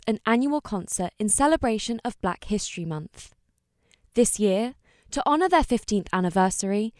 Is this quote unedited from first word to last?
yes; 0 cuts

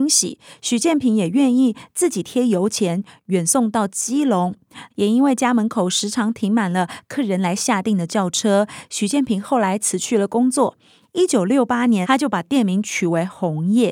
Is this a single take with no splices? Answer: no; 2 cuts; at 4.9 s, 12.0 s

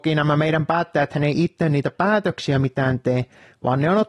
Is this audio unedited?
yes; 0 cuts

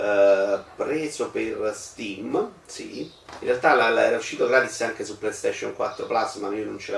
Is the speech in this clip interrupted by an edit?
no; 0 cuts

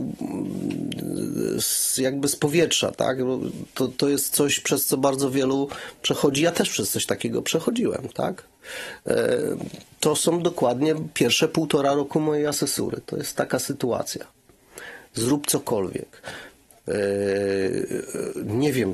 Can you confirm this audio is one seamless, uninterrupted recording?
yes; 0 cuts

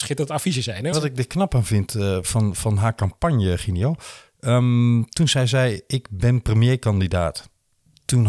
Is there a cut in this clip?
yes; 1 cut; at 0.9 s

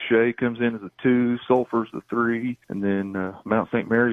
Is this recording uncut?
yes; 0 cuts

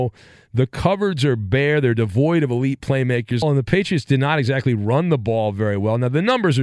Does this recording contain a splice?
yes; 1 cut; at 3.4 s

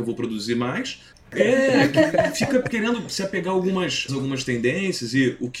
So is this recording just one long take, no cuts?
no; 2 cuts; at 1.1 s, 4.1 s

